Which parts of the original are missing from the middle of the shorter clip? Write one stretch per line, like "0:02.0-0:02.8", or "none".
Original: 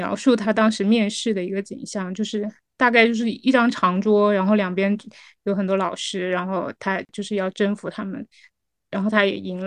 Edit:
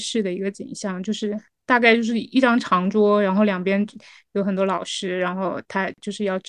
none